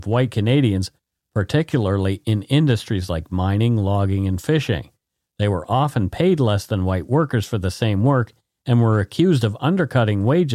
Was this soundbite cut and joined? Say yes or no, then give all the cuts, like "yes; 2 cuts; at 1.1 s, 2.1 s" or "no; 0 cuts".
no; 0 cuts